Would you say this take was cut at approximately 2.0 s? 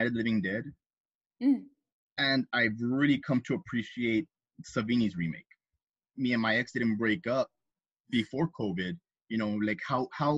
no; 1 cut; at 6.1 s

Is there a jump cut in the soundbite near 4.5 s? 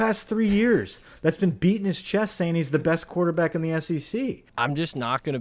yes; 1 cut; at 4.5 s

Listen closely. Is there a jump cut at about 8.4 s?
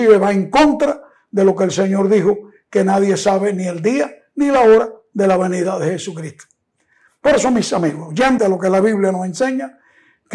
yes; 1 cut; at 8.4 s

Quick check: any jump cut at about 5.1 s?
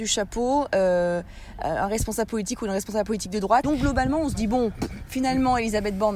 no; 1 cut; at 3.6 s

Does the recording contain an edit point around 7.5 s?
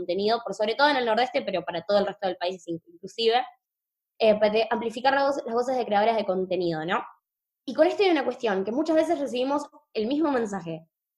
no; 0 cuts

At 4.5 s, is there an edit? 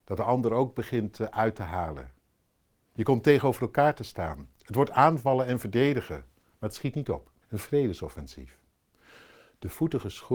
yes; 2 cuts; at 4.5 s, 7.4 s

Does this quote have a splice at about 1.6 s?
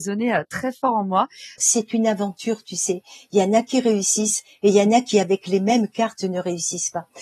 yes; 1 cut; at 1.6 s

